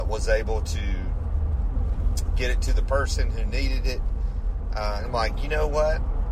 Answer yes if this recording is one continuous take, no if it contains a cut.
no